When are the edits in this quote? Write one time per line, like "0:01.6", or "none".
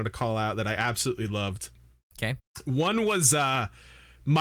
none